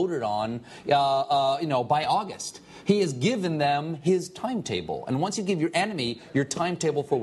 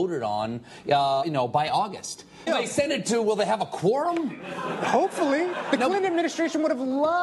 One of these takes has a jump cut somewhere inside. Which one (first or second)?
second